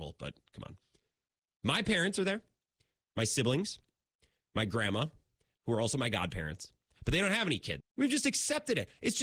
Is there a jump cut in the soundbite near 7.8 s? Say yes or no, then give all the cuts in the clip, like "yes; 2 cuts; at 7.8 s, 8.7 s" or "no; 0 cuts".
yes; 2 cuts; at 5.5 s, 7.8 s